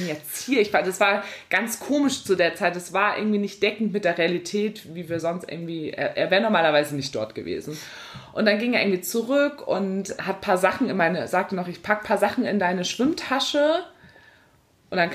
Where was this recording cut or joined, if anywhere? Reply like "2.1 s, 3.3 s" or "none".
10.2 s